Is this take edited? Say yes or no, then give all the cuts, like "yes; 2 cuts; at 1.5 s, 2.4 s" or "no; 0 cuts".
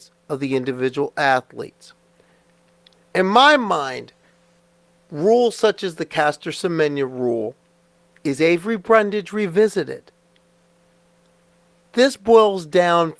no; 0 cuts